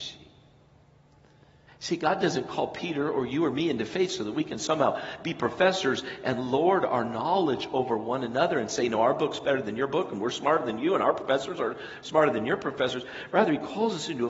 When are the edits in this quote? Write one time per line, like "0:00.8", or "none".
0:01.7